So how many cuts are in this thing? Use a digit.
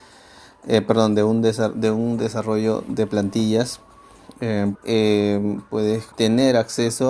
2